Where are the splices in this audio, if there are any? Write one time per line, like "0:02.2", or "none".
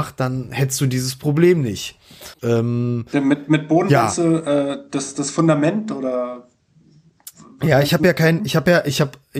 0:02.4